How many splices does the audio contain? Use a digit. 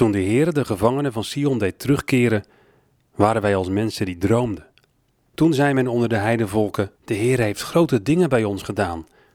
2